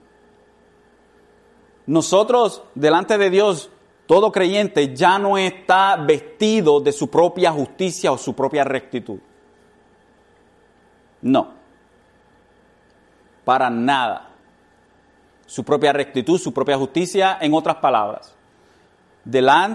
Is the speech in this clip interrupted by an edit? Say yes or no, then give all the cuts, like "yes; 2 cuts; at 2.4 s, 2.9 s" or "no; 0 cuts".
no; 0 cuts